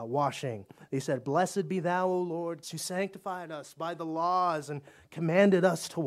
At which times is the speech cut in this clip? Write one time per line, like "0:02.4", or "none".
0:02.6